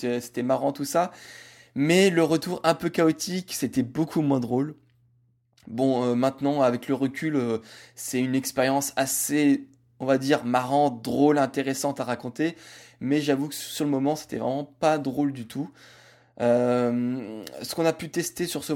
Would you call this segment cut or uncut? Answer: uncut